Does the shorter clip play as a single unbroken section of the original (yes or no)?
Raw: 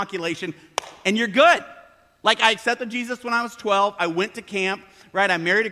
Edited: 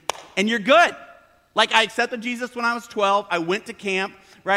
yes